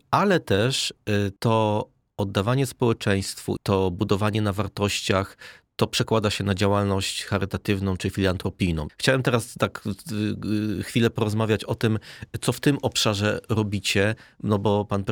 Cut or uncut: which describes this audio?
cut